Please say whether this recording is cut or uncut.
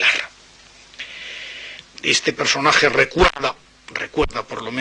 cut